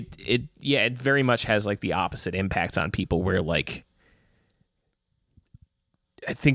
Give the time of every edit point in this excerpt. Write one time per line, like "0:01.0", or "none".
none

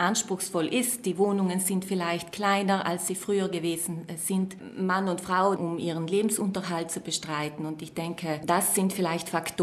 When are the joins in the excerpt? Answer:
0:05.6

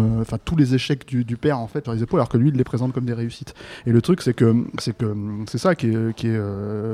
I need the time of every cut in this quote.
0:01.8

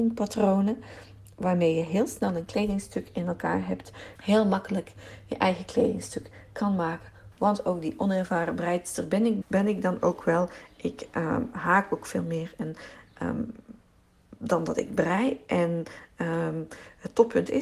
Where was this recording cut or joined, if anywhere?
0:04.2
0:07.3
0:09.4

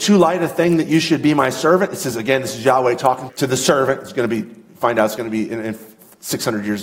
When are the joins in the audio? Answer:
0:03.3

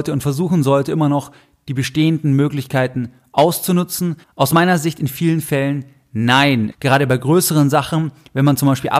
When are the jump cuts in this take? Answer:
0:04.2
0:06.7

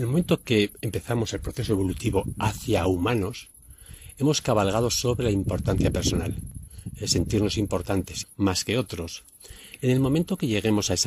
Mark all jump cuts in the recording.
0:08.2

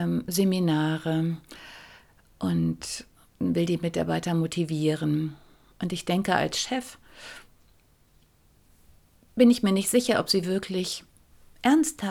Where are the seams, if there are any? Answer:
0:05.7

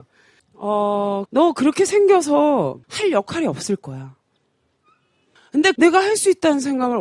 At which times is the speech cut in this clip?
0:01.3
0:02.8

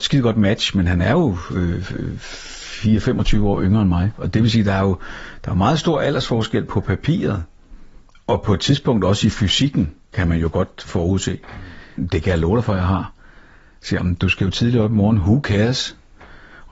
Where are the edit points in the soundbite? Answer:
0:12.0

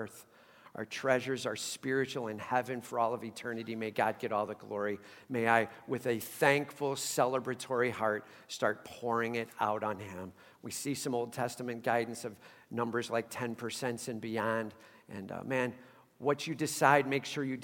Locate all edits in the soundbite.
none

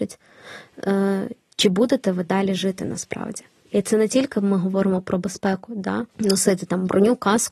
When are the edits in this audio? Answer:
0:06.1

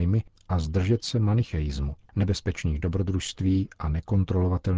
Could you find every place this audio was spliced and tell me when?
0:02.1

